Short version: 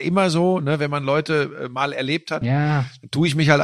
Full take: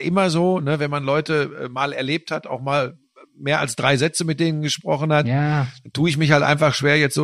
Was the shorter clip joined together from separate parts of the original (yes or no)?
yes